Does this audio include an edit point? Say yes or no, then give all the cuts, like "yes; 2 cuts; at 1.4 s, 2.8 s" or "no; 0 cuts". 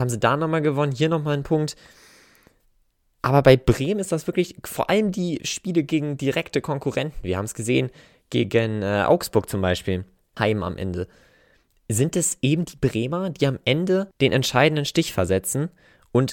yes; 2 cuts; at 10.4 s, 14.1 s